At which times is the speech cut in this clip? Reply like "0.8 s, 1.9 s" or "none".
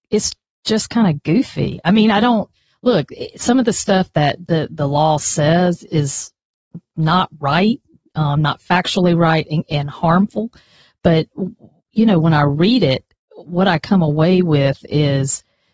5.9 s